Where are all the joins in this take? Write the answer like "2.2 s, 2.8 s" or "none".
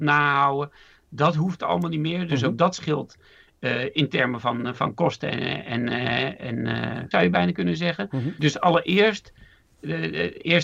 7.1 s, 8.4 s